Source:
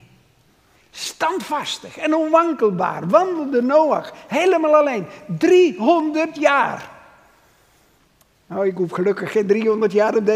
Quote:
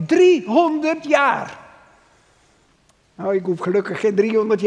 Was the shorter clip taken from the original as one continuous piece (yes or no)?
yes